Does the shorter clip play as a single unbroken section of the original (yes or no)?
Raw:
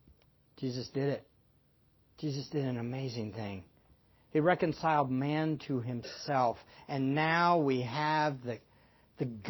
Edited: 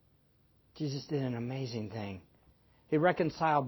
yes